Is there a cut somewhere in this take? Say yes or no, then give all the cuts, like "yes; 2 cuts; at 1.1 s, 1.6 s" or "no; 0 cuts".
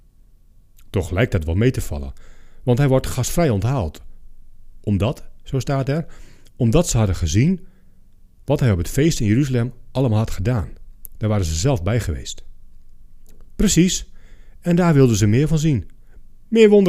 no; 0 cuts